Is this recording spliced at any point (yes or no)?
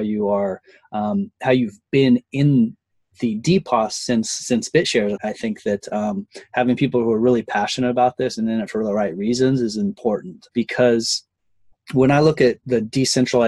yes